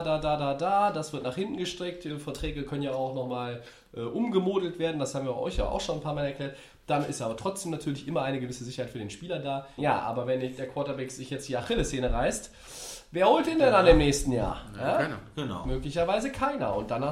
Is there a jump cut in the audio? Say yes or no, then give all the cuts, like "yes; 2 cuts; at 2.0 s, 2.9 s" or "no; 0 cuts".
yes; 1 cut; at 9.8 s